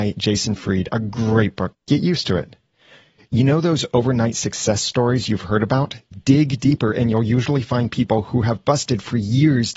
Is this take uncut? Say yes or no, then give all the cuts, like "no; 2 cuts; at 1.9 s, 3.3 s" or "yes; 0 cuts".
no; 2 cuts; at 1.7 s, 6.1 s